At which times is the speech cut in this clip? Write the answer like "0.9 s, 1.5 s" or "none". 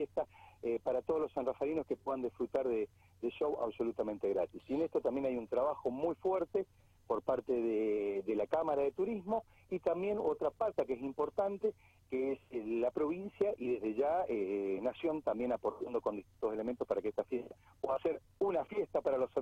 none

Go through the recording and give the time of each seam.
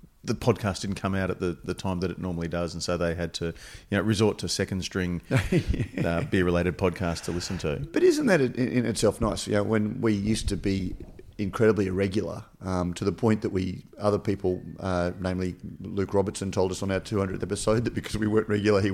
13.9 s

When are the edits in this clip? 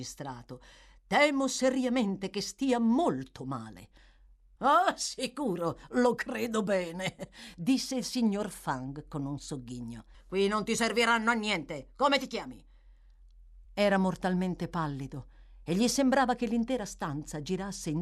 10.1 s, 13.6 s

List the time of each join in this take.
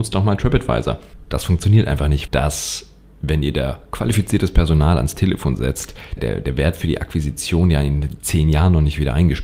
2.3 s, 6.2 s

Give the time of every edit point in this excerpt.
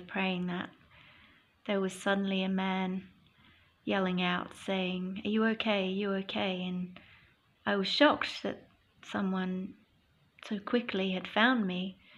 none

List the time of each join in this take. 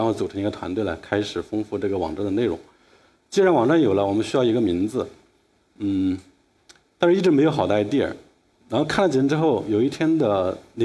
8.5 s

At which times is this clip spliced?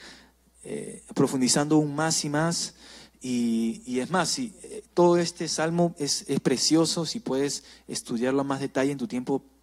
none

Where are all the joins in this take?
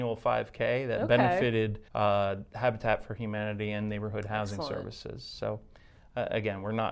1.9 s

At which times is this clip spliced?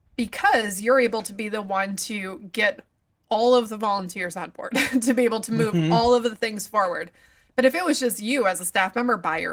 none

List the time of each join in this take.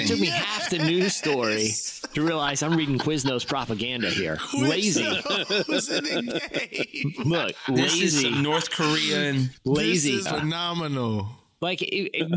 10.3 s

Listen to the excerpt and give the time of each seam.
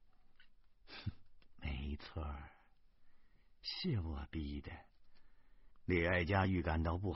5.7 s

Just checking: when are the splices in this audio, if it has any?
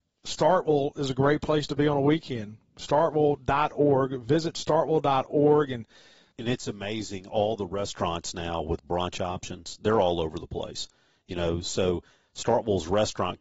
6.3 s

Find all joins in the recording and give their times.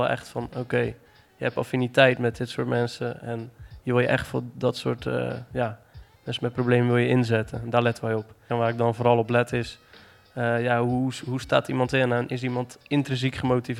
8.5 s

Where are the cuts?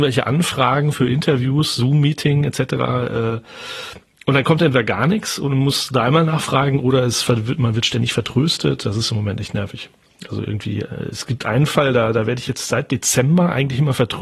none

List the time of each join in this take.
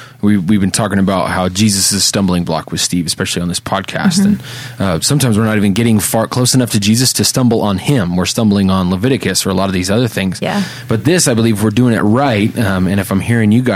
none

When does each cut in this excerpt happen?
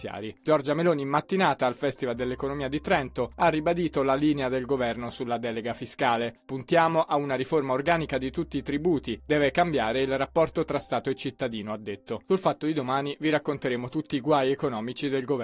none

